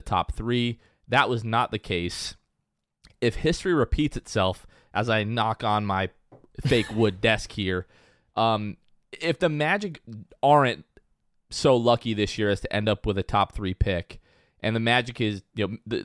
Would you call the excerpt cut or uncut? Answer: uncut